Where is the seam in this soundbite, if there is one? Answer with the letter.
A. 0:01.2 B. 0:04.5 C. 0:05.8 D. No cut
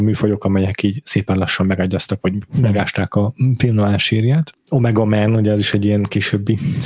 B